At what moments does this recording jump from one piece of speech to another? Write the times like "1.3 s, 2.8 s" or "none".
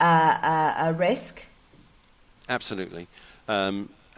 none